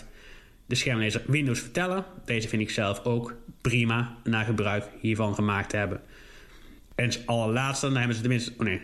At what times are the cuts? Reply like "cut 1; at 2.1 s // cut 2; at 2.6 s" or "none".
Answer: cut 1; at 6.8 s